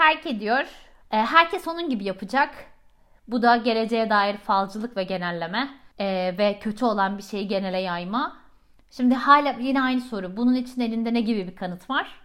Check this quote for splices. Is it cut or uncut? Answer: cut